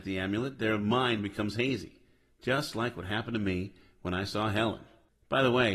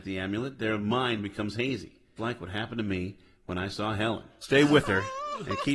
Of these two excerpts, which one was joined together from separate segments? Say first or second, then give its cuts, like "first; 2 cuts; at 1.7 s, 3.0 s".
second; 2 cuts; at 2.2 s, 4.4 s